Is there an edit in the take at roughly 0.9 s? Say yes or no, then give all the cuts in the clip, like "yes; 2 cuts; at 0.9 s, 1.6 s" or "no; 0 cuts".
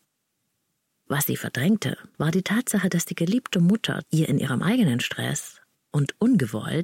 no; 2 cuts; at 2.1 s, 4.0 s